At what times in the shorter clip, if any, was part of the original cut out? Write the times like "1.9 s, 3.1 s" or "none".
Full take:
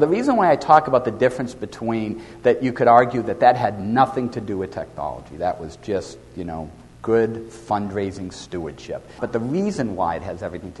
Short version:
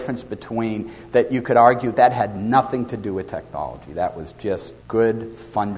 1.9 s, 4.8 s